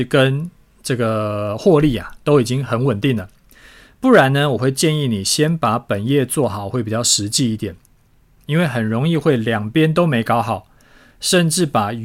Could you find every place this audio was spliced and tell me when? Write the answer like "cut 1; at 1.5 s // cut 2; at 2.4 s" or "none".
none